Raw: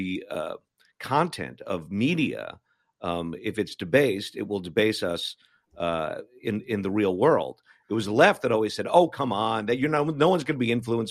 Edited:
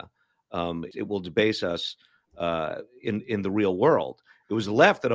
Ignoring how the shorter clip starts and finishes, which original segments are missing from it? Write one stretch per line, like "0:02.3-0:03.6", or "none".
0:03.4-0:04.3